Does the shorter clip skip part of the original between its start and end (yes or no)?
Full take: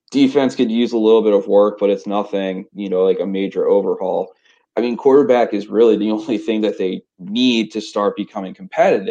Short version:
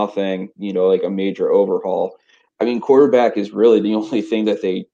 no